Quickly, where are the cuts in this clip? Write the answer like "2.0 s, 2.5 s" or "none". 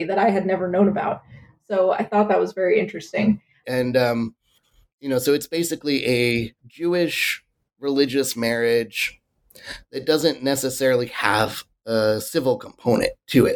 3.6 s, 6.6 s